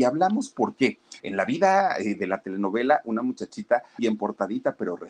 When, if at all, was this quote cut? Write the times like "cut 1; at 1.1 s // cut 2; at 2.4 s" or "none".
cut 1; at 1.2 s // cut 2; at 4.0 s